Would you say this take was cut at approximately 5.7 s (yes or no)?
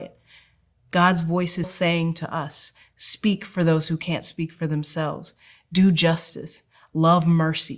no